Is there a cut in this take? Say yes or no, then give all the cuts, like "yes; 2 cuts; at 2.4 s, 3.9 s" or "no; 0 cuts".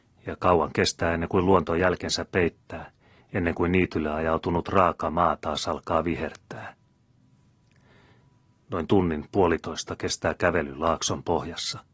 no; 0 cuts